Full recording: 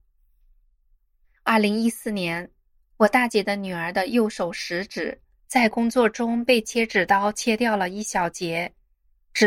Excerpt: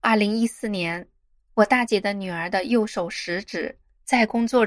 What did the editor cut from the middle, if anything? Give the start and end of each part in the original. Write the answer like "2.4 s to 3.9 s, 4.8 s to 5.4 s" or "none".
none